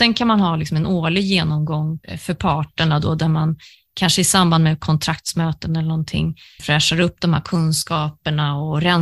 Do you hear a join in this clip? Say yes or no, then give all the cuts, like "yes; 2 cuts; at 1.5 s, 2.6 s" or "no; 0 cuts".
no; 0 cuts